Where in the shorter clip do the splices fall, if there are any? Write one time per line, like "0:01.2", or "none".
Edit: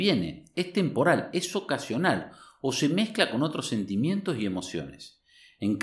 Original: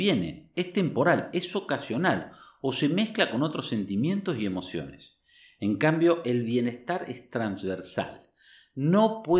none

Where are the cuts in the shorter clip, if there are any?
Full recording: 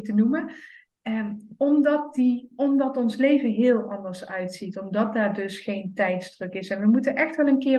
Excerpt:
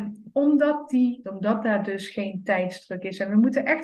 0:01.2

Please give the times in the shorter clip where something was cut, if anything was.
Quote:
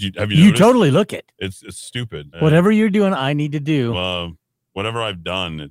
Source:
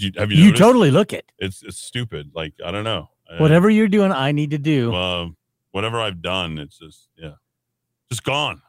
0:02.3

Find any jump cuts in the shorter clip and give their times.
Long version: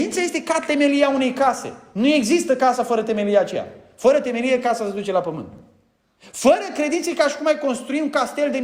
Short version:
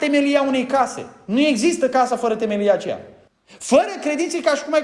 0:03.3

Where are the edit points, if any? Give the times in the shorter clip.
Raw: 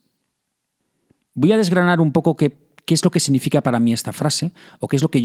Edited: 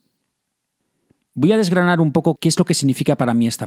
0:02.4

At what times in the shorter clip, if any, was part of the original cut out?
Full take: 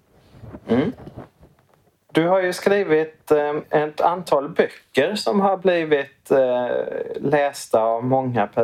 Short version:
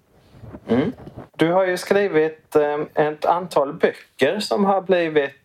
0:01.3

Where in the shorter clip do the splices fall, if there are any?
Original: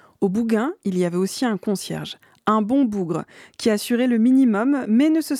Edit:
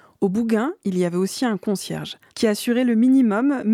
0:02.3

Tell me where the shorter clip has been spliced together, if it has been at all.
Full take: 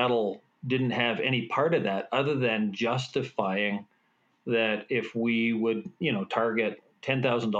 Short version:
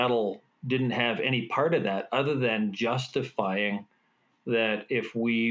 none

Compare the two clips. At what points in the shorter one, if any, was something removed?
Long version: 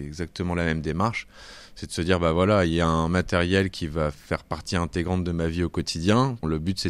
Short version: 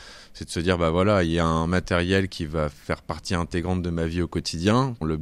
none

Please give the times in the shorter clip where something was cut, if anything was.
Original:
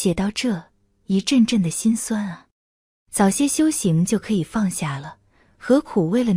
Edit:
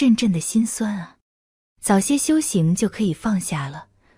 none

